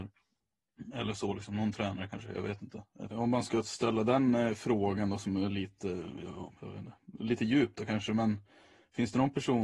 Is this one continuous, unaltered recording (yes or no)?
no